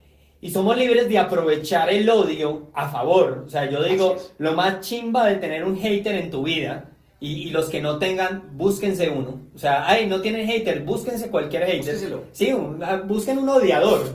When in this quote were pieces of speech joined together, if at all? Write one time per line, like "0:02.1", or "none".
none